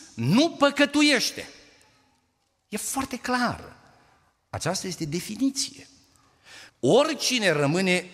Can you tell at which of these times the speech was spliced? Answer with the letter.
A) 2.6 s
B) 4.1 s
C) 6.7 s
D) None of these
C